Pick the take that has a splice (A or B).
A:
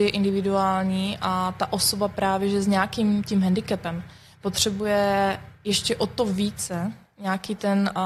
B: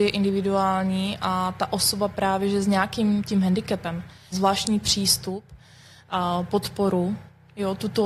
B